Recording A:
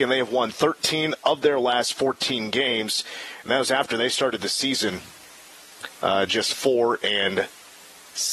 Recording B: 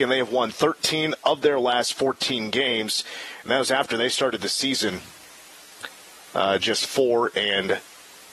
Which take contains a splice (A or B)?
A